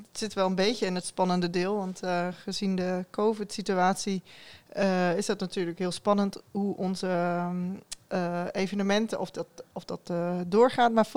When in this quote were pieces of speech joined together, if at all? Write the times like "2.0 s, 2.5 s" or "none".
none